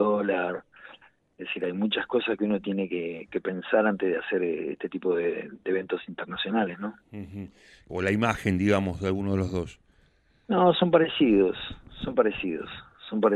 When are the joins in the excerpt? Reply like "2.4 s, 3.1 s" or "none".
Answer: 7.9 s